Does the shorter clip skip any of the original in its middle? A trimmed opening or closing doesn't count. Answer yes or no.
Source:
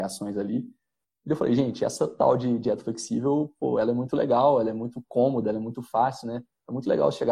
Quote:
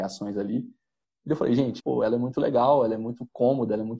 yes